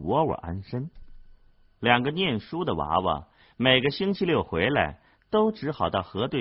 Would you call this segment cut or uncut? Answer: uncut